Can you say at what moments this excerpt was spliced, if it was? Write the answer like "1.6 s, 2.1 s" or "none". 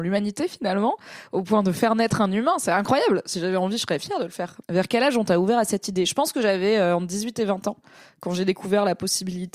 4.6 s